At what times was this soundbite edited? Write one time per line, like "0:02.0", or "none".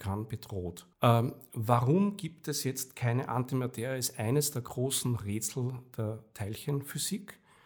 0:00.9